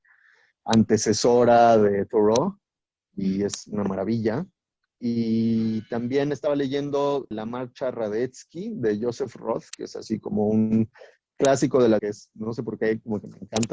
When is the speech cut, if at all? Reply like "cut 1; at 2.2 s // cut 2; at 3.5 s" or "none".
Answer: cut 1; at 7.3 s // cut 2; at 12.0 s